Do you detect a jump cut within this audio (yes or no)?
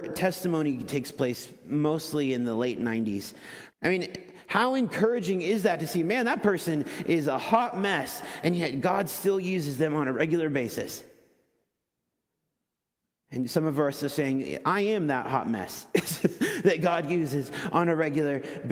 yes